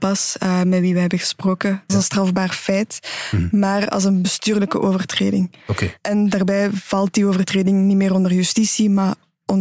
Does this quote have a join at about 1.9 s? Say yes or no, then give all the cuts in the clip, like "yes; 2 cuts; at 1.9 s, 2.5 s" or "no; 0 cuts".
yes; 1 cut; at 1.9 s